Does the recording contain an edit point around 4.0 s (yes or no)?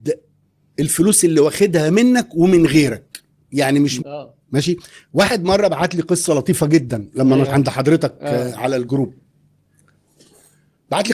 yes